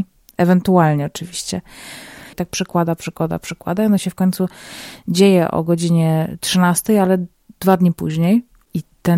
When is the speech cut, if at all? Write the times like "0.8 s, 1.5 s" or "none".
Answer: 2.3 s